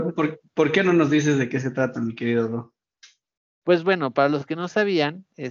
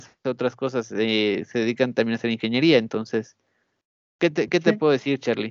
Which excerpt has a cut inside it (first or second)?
second